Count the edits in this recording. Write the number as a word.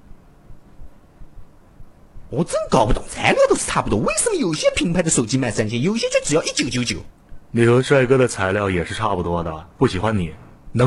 one